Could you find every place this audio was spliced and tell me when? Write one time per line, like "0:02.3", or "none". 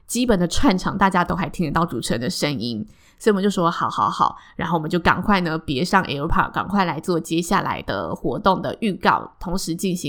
none